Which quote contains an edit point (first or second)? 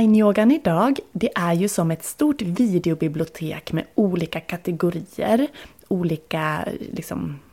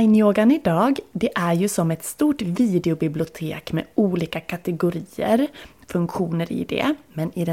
second